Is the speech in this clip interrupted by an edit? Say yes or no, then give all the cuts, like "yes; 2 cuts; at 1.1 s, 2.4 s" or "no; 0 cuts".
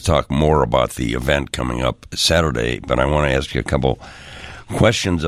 no; 0 cuts